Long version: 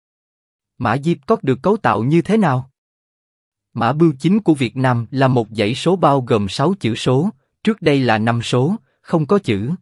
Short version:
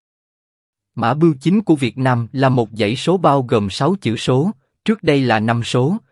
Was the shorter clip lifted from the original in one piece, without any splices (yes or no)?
yes